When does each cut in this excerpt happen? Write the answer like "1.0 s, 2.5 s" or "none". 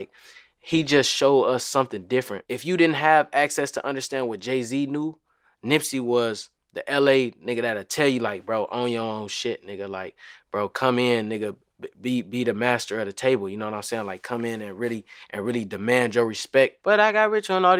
none